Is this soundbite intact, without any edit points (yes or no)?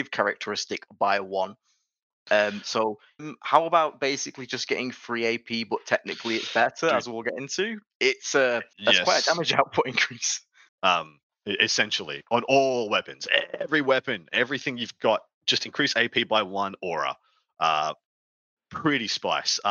no